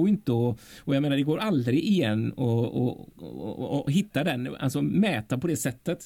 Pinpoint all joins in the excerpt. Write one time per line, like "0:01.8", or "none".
none